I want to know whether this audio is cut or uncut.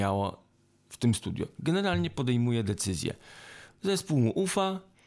uncut